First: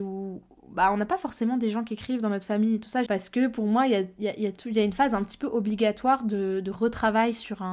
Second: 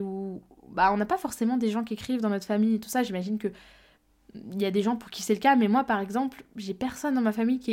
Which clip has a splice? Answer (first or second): first